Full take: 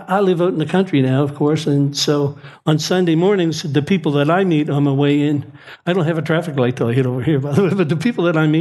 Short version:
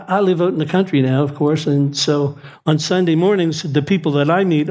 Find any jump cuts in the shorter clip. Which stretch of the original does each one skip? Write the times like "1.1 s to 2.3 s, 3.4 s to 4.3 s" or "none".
none